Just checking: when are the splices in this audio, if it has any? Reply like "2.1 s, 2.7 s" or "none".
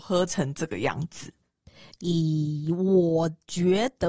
none